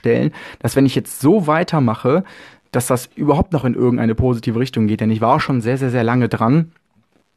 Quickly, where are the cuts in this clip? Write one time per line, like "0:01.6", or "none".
none